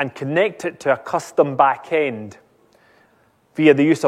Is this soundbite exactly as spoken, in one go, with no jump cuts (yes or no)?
yes